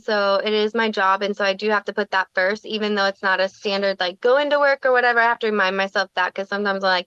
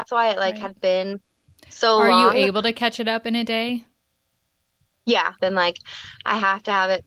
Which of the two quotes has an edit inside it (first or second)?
second